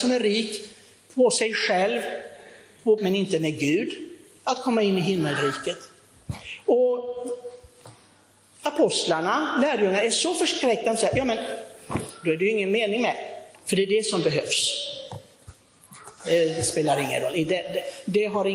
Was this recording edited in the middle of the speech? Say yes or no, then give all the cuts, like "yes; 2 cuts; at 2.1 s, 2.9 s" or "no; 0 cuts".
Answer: yes; 3 cuts; at 3.0 s, 13.6 s, 16.2 s